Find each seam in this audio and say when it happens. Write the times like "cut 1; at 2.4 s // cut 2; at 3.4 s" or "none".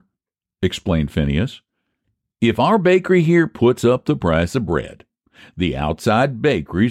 none